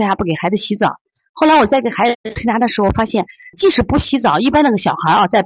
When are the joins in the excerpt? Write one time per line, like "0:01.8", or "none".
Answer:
0:03.5